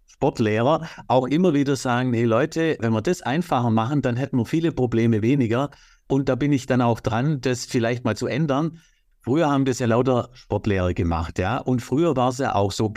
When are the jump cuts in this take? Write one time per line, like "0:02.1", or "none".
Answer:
none